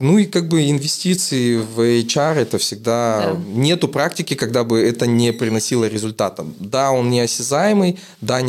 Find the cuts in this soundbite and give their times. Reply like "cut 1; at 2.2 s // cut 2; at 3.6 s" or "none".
none